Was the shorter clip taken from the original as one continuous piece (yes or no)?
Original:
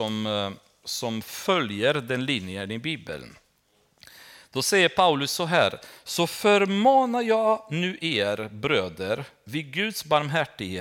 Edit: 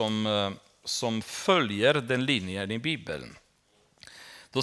yes